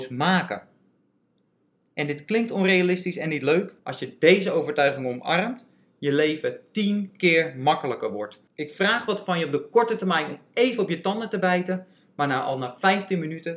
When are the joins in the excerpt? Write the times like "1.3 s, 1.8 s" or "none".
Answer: 3.8 s